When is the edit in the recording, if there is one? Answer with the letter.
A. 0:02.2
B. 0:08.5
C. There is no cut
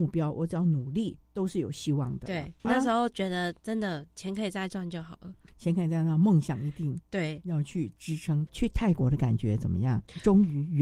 B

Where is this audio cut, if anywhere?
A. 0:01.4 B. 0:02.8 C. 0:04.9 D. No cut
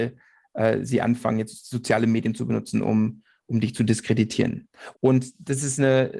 C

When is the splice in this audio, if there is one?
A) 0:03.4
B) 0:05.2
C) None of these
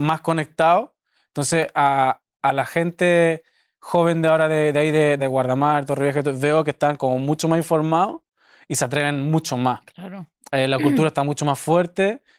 B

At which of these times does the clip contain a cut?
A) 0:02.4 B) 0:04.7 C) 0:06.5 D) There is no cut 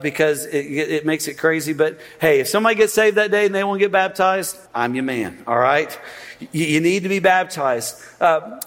B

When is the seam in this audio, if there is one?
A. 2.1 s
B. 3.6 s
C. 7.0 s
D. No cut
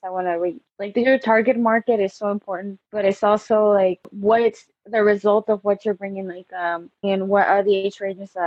C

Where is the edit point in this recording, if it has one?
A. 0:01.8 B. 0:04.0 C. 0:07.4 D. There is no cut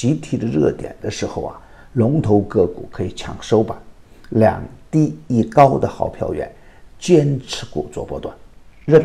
C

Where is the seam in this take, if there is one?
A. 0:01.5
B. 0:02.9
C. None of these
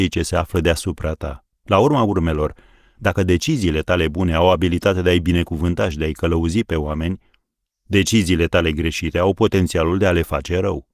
A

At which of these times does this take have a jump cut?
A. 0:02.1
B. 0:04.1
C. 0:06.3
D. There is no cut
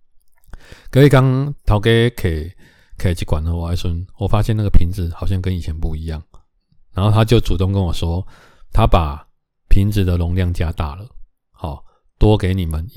D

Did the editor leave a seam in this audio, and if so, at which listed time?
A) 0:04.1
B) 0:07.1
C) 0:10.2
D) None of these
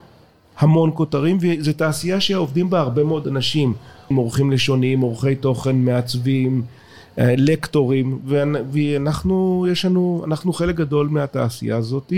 A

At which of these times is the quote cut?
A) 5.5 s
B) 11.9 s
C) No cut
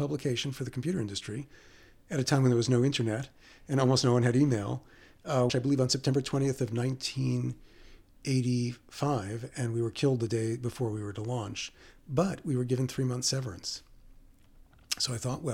A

